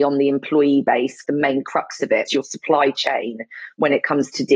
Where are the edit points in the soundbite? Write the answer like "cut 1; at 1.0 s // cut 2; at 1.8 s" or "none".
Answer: cut 1; at 1.2 s // cut 2; at 2.3 s